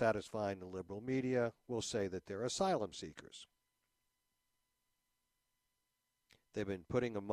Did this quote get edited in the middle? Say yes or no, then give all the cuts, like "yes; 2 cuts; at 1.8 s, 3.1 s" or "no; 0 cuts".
no; 0 cuts